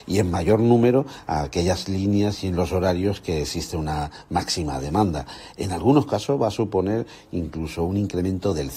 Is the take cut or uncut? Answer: uncut